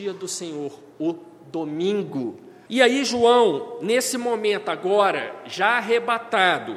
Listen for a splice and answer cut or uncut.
cut